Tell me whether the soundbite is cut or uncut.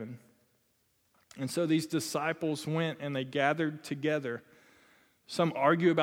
uncut